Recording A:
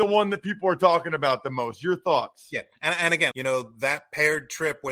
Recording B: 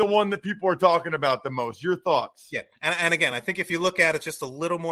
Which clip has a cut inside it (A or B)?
A